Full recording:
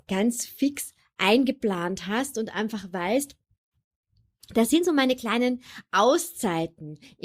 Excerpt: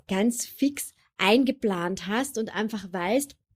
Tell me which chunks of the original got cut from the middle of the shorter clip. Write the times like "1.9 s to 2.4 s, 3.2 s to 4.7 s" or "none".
none